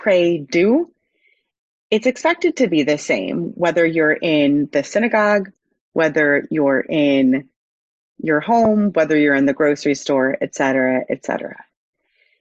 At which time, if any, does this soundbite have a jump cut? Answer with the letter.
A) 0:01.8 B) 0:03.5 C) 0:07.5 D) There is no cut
D